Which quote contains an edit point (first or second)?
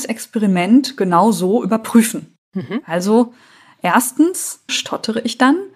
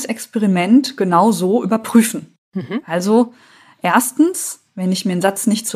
first